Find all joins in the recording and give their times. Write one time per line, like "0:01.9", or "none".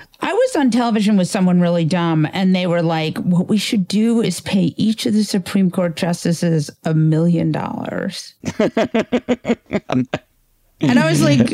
none